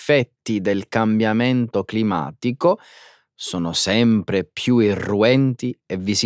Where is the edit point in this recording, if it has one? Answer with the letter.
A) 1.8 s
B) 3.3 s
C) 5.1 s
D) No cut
D